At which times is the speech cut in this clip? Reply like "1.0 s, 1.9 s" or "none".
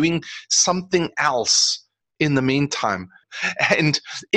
3.2 s